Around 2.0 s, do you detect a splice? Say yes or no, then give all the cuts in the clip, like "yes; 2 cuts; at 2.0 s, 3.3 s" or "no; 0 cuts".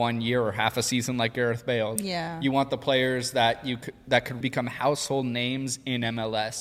yes; 2 cuts; at 2.0 s, 4.4 s